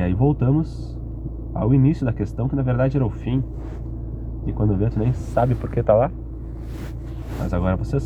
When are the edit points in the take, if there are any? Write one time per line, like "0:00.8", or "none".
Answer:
0:04.4